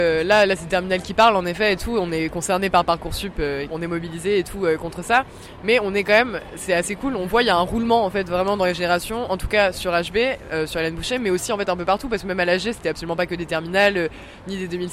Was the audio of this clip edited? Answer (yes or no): yes